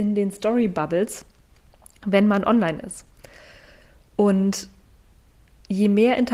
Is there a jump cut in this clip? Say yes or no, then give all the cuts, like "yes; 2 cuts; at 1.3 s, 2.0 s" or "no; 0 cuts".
no; 0 cuts